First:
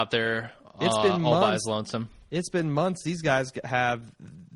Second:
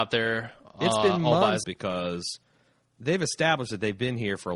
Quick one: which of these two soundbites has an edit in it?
second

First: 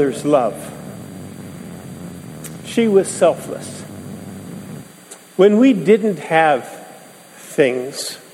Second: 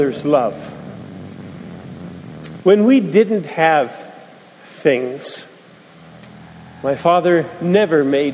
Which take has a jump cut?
second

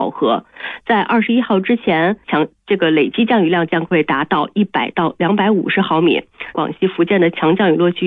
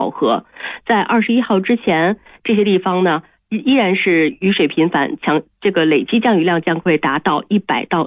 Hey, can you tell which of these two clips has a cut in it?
first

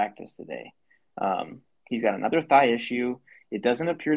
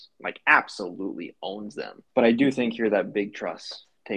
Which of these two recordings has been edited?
second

